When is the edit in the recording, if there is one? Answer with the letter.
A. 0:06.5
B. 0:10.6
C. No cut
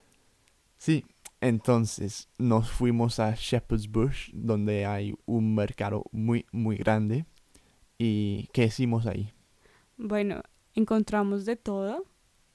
B